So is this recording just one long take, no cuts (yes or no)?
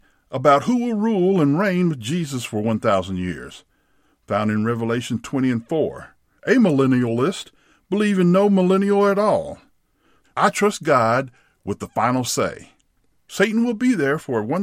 no